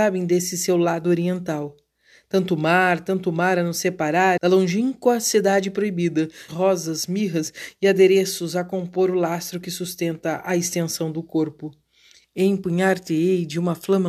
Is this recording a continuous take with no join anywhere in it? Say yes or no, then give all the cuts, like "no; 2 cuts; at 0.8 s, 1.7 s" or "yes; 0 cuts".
no; 3 cuts; at 4.4 s, 6.5 s, 12.2 s